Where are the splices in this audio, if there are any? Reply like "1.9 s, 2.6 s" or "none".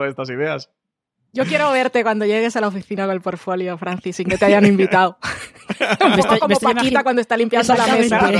none